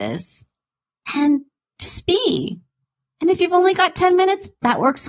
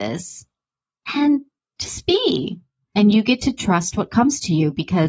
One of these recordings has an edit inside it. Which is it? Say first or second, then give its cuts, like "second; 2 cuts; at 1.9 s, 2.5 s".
second; 1 cut; at 2.8 s